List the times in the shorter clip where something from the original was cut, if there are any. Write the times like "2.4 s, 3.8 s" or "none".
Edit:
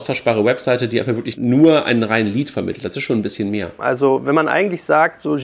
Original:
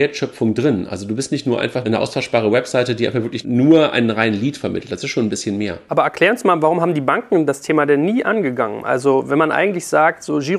3.8 s